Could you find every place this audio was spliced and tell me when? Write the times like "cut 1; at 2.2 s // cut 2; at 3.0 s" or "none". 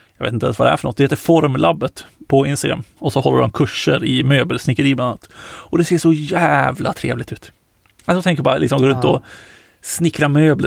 cut 1; at 3.0 s